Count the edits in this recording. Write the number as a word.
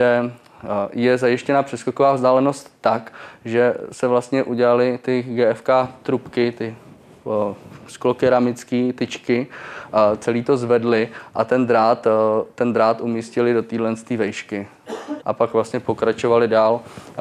one